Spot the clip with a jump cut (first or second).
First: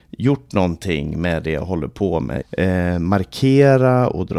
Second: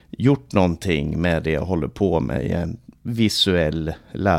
first